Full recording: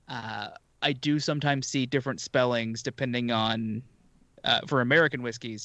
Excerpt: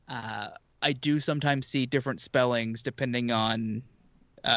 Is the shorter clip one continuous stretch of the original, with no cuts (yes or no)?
yes